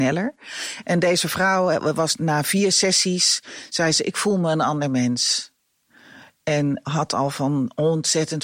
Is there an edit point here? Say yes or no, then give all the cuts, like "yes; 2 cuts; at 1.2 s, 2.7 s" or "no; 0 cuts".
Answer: no; 0 cuts